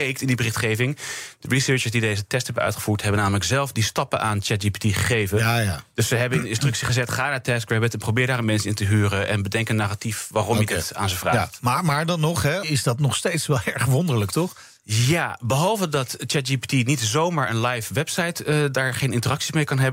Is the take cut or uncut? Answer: cut